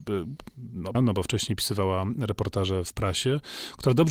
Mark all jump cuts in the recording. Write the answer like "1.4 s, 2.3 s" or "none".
0.9 s, 2.8 s